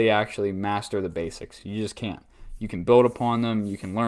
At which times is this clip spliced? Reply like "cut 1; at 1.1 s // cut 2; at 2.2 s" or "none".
none